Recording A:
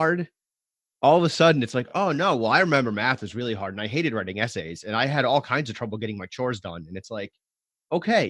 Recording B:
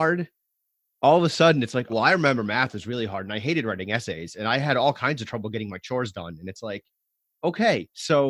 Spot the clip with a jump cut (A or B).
B